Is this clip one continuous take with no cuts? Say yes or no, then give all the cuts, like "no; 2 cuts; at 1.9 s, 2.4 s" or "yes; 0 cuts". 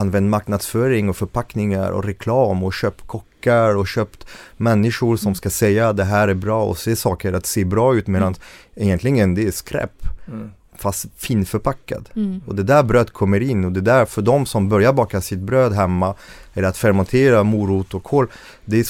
yes; 0 cuts